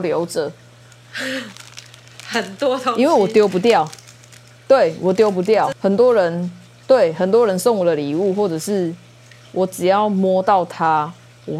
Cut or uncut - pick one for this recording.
cut